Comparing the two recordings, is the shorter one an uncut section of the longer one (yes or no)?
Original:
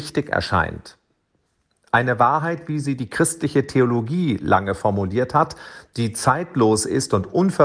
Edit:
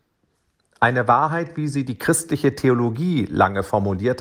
yes